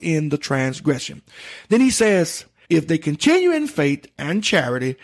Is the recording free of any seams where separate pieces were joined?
no; 1 cut; at 2.6 s

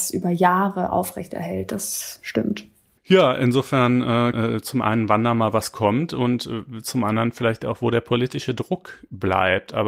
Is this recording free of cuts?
no; 2 cuts; at 3.0 s, 4.3 s

